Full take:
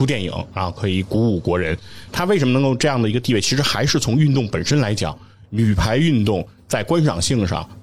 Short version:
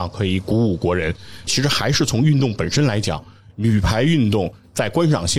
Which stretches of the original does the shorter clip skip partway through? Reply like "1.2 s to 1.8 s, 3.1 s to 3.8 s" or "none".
2.1 s to 3.4 s